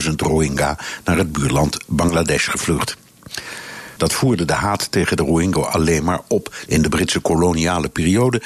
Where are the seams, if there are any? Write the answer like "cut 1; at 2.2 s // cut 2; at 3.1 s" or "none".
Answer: cut 1; at 4.0 s // cut 2; at 6.7 s